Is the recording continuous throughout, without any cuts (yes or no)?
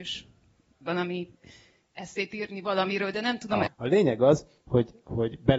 no